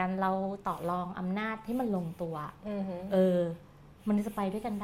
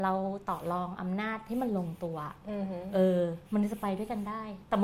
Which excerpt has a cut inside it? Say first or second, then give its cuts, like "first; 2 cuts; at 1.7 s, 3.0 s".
second; 1 cut; at 3.5 s